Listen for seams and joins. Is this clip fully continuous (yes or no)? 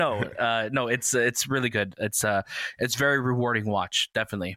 yes